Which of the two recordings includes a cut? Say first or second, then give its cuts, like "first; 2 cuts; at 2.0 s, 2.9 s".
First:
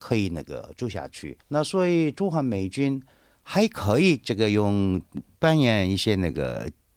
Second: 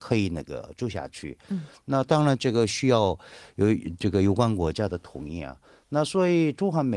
first; 1 cut; at 1.4 s